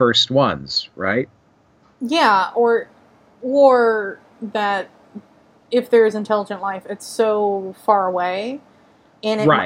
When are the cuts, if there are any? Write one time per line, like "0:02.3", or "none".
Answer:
none